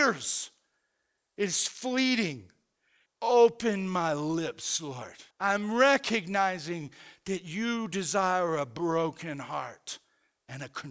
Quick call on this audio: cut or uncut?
cut